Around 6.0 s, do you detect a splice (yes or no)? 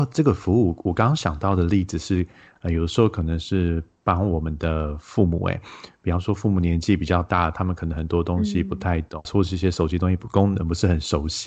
no